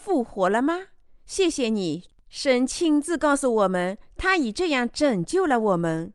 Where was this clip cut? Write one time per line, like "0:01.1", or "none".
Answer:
0:02.1